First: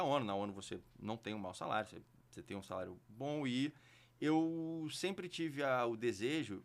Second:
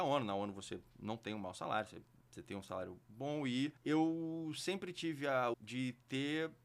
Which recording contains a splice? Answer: second; 2 cuts; at 3.8 s, 5.5 s

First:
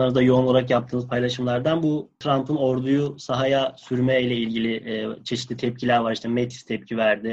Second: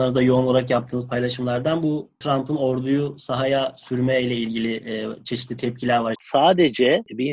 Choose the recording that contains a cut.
second; 1 cut; at 6.1 s

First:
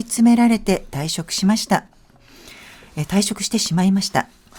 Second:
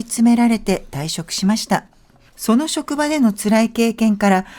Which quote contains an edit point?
second; 1 cut; at 2.3 s

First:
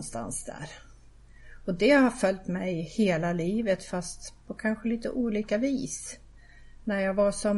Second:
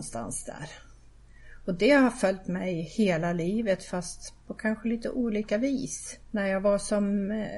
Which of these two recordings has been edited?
second; 1 cut; at 6.2 s

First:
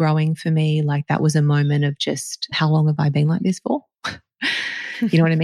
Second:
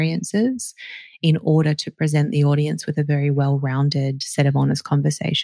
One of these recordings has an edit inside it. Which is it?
first; 1 cut; at 2.5 s

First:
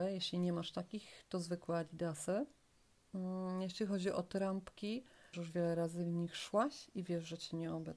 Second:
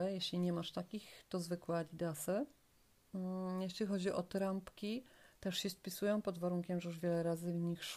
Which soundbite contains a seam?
first; 1 cut; at 5.3 s

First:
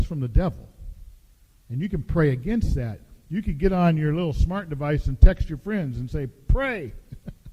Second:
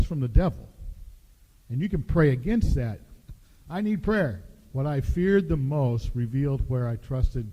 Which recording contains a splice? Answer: second; 2 cuts; at 3.2 s, 4.7 s

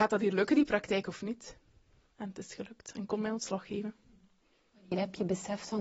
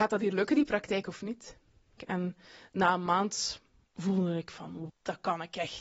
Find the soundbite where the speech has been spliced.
second; 2 cuts; at 2.0 s, 4.9 s

